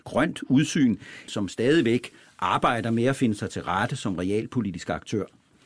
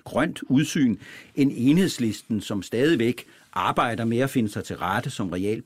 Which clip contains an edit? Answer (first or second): first